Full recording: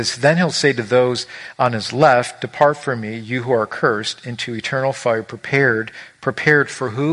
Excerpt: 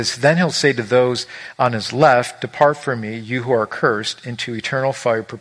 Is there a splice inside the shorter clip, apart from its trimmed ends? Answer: no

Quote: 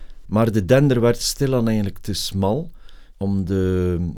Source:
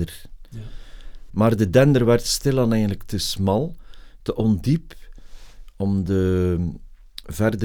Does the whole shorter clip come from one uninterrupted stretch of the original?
no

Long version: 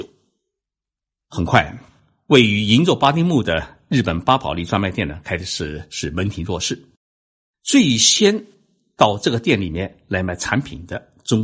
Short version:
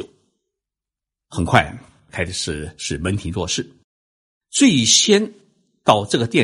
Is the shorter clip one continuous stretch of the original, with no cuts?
no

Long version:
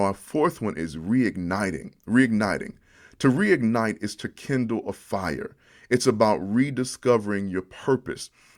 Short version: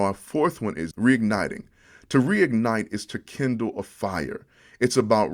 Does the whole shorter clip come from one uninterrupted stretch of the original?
no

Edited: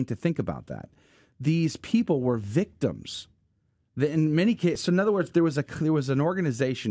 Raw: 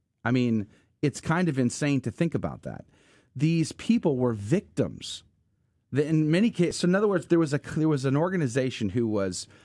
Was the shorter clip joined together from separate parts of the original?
no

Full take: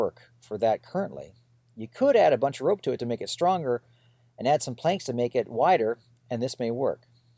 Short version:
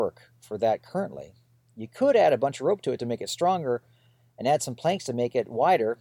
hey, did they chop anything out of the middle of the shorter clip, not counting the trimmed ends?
no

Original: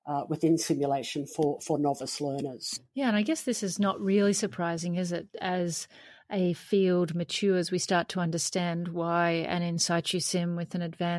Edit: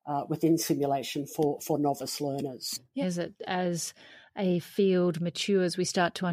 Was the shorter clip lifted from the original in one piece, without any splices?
no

